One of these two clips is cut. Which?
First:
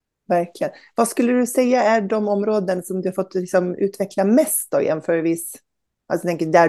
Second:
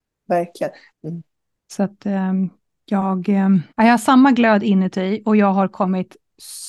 second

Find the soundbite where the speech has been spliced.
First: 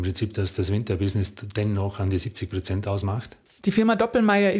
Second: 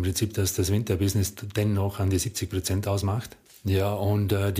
first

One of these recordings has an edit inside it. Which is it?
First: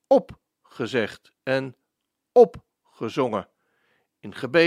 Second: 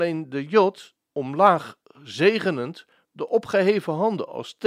second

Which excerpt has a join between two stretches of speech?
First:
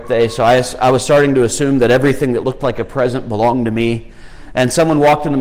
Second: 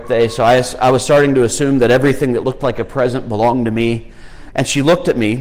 second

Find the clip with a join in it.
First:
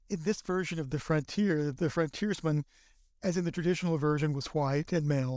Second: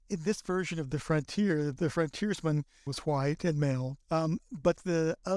second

